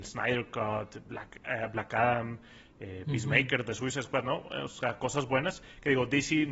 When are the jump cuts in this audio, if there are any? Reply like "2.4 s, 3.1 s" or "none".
none